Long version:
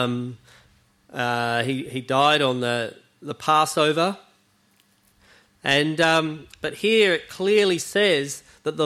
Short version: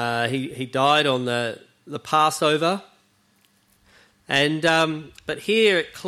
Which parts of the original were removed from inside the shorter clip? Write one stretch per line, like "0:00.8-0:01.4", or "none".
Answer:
none

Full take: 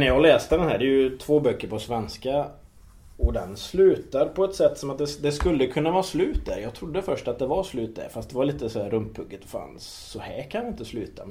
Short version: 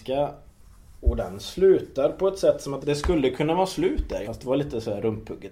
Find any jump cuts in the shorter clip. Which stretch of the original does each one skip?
0:05.0-0:05.2
0:06.6-0:08.1

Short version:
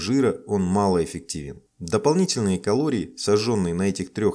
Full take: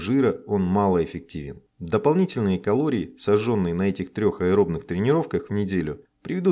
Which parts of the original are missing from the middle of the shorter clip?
none

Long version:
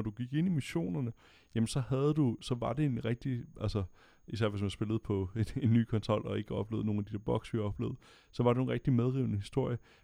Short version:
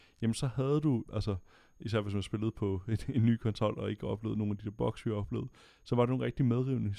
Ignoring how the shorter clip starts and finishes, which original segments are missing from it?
0:02.4-0:03.5

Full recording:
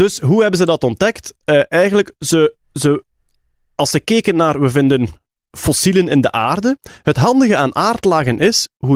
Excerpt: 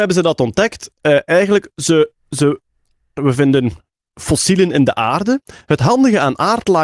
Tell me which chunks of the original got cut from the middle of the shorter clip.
0:03.6-0:04.5

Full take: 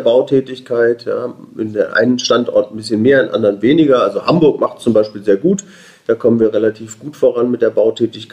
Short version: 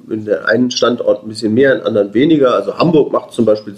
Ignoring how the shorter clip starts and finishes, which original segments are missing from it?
none

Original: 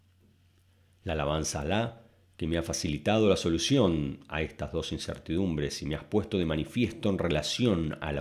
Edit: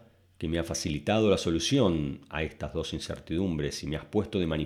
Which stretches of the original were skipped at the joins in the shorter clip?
none

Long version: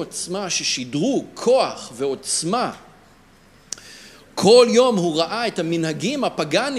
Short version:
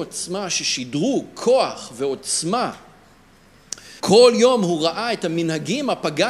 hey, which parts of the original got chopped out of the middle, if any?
0:04.0-0:04.3

